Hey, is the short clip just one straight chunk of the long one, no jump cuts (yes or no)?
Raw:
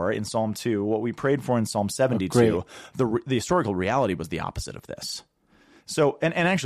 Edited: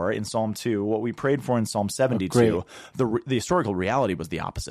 yes